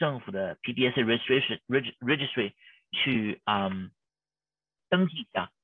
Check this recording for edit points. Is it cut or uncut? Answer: uncut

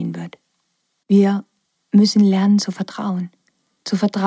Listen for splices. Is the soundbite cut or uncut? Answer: uncut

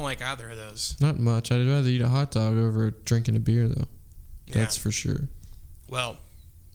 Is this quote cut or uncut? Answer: uncut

